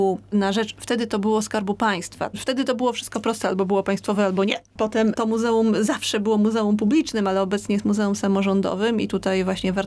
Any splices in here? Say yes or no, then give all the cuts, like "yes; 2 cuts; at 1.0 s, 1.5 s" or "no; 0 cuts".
no; 0 cuts